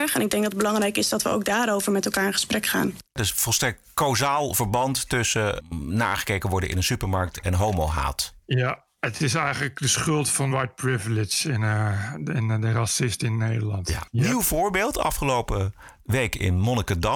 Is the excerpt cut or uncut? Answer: cut